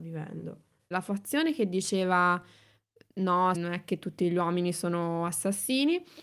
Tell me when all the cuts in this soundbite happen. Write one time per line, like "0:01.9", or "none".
0:00.9
0:03.5

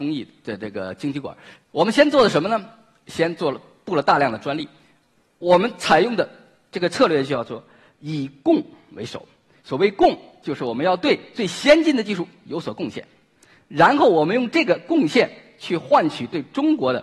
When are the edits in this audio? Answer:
0:01.6

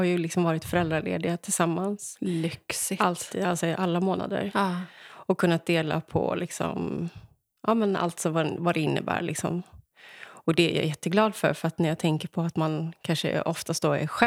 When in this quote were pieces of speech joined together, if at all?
none

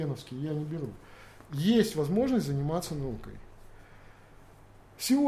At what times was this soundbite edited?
none

